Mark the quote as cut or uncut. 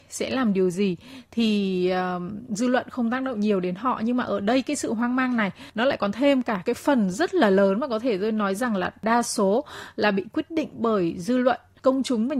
uncut